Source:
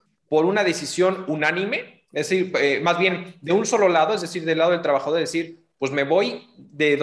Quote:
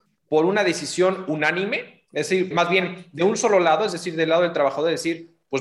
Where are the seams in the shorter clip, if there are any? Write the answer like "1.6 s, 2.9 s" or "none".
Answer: 2.5 s